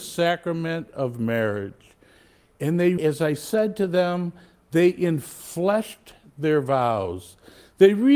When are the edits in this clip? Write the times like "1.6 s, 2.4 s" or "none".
3.0 s

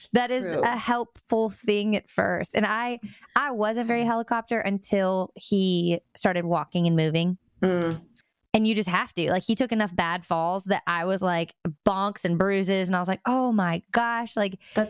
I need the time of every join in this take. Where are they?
none

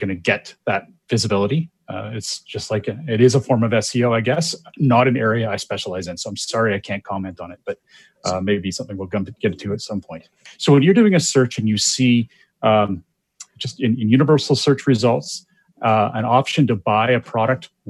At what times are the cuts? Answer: 10.5 s

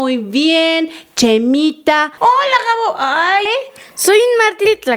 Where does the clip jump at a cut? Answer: 2.2 s, 3.5 s

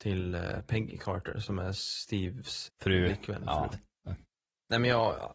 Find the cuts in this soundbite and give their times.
2.7 s, 3.7 s

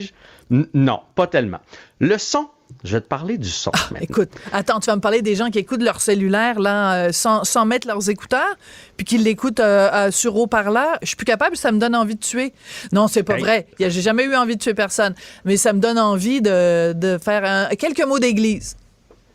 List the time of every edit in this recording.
none

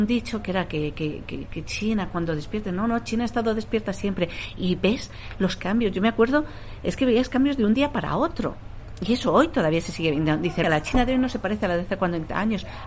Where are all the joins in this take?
10.6 s

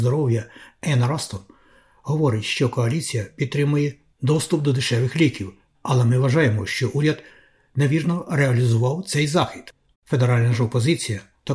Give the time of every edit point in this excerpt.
5.7 s, 9.9 s

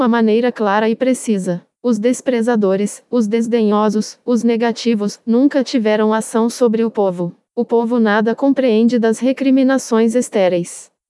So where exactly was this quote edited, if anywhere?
1.8 s

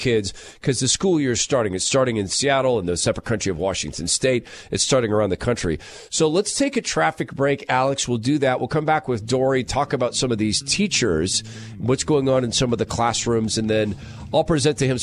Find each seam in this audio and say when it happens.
none

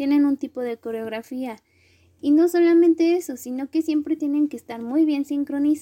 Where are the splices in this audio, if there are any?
none

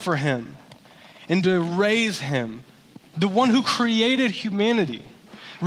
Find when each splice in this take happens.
3.1 s

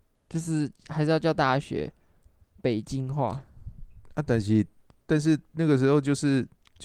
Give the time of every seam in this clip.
none

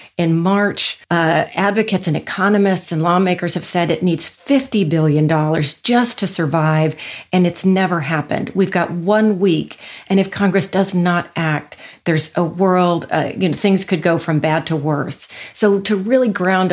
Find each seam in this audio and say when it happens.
1.0 s

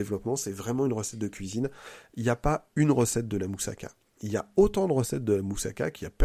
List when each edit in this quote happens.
none

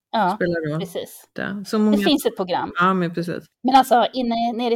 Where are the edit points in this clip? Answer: 1.4 s

